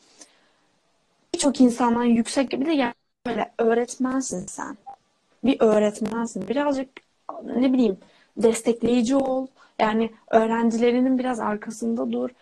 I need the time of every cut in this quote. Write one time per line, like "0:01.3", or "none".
none

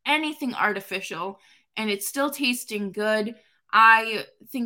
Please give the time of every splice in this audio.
none

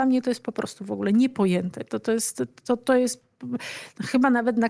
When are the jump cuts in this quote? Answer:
none

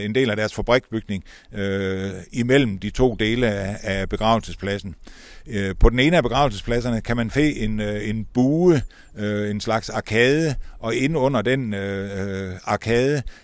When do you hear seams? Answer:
none

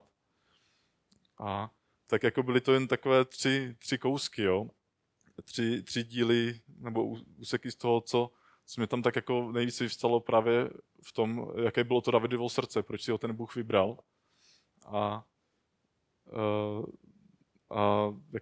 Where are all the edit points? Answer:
none

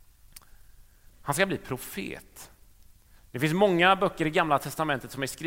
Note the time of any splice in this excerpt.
0:01.1
0:03.2

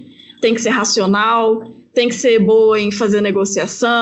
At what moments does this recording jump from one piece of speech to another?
none

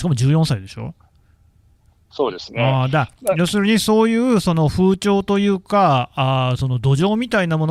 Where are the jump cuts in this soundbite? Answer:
none

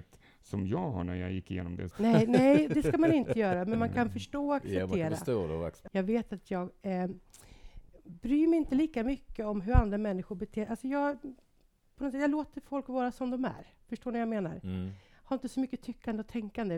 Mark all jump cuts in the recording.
0:01.9
0:05.9

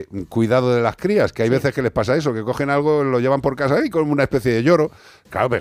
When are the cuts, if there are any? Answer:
0:03.8

